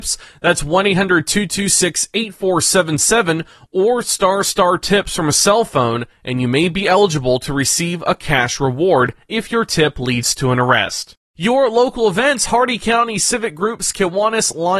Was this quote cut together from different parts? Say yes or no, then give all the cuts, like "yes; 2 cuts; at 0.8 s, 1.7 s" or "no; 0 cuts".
no; 0 cuts